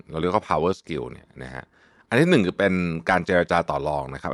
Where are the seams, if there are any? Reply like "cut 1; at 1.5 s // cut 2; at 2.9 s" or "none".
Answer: none